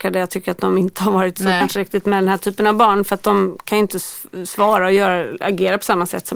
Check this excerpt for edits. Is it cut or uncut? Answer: cut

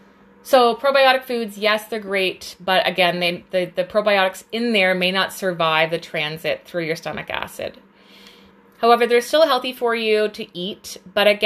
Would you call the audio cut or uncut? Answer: uncut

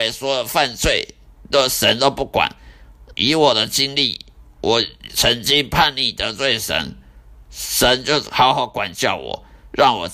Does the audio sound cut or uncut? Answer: cut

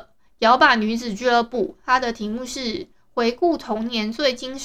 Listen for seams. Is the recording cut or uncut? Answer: uncut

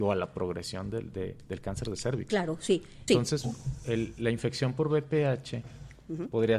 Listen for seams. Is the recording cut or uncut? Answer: cut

